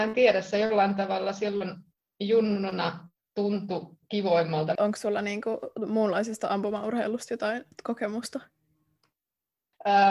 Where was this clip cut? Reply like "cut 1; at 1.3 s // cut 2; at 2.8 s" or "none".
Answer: cut 1; at 4.8 s // cut 2; at 7.7 s